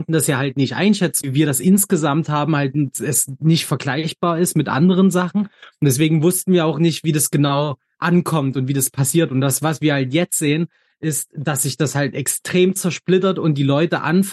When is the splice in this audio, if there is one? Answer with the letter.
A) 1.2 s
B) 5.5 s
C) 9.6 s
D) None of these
A